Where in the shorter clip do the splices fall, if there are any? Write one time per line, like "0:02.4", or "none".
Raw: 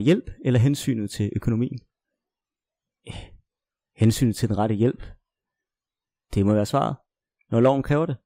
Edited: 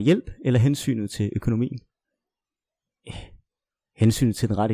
none